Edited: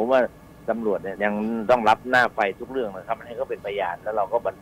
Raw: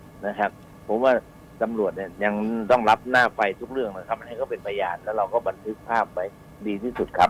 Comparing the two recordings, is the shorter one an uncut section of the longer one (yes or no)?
no